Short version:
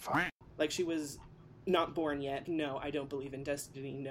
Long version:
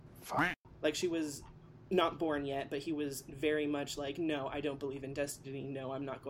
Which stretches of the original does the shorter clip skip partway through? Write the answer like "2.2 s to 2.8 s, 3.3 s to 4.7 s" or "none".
2.7 s to 4.1 s